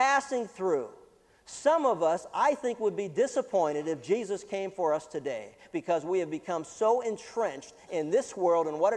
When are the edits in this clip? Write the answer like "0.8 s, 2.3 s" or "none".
none